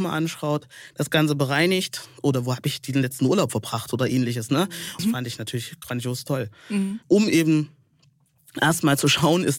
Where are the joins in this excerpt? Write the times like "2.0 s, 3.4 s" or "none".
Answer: 5.0 s, 7.0 s